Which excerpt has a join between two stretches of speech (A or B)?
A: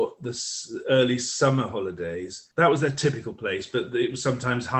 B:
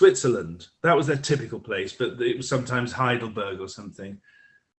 A